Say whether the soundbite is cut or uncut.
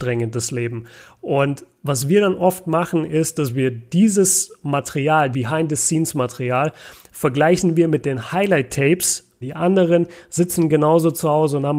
cut